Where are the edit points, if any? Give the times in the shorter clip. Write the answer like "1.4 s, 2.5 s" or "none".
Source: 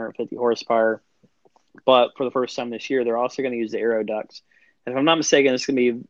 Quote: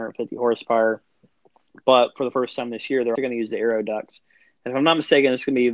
3.2 s